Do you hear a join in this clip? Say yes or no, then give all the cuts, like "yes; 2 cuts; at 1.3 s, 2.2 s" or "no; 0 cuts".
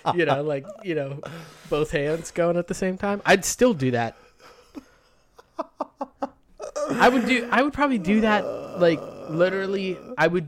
no; 0 cuts